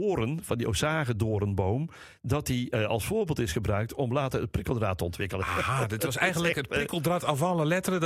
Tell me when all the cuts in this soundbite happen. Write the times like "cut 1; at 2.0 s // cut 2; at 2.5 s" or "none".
none